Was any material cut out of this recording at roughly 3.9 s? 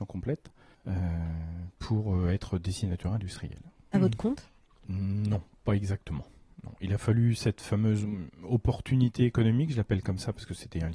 yes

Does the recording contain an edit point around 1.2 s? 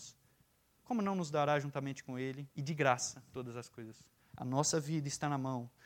no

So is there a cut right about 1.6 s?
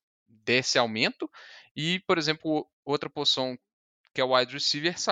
no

